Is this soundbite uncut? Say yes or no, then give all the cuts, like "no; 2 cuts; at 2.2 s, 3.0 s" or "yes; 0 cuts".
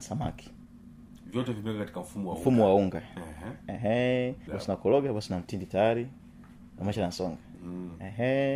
no; 1 cut; at 4.5 s